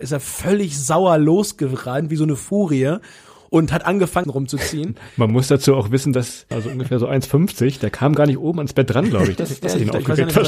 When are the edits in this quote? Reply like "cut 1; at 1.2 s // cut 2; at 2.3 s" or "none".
cut 1; at 4.2 s // cut 2; at 6.5 s